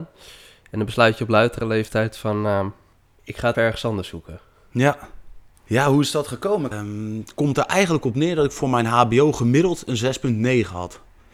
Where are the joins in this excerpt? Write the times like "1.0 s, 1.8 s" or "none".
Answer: 3.5 s, 5.5 s, 6.7 s